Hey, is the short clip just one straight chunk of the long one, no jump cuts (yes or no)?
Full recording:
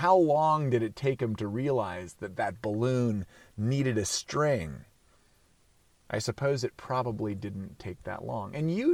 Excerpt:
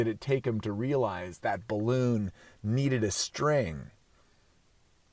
no